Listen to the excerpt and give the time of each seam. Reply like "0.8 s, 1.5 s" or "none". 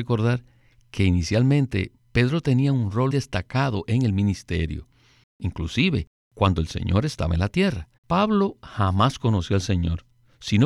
3.1 s, 8.0 s